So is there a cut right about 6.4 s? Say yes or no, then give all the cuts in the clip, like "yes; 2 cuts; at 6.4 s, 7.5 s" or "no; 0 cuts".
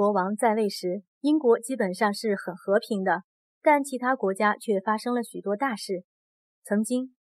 no; 0 cuts